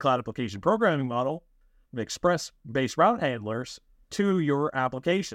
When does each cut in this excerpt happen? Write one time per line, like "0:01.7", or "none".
0:01.9